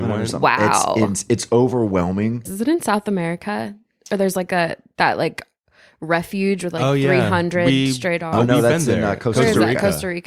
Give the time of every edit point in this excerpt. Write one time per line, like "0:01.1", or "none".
0:02.5